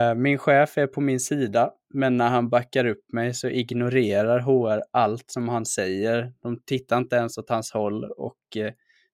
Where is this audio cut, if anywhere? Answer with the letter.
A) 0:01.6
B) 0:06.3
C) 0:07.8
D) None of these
D